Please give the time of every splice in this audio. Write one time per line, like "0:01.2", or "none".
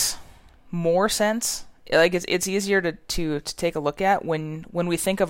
none